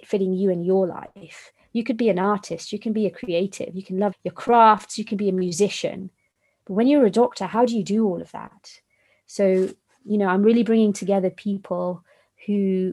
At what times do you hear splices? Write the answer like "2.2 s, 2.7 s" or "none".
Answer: 4.1 s